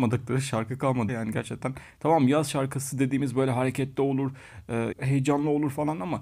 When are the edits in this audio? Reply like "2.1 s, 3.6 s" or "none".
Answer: 1.1 s, 4.9 s

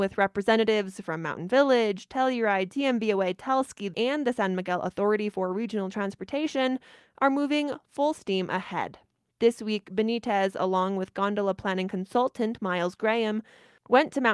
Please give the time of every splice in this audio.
3.9 s

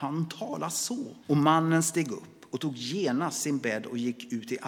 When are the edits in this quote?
1.2 s

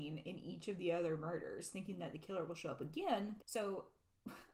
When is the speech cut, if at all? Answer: 3.4 s

